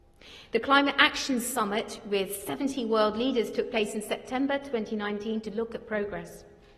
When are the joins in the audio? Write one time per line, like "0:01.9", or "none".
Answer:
none